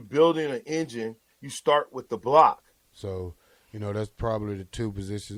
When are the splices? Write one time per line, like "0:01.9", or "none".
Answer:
0:02.8